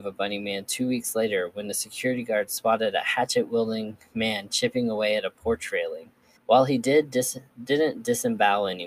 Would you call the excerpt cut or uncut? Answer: cut